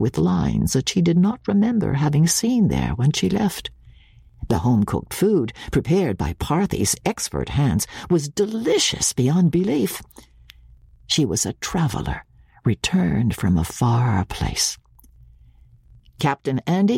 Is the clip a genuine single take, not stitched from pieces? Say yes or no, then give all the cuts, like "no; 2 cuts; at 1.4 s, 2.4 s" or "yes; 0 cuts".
yes; 0 cuts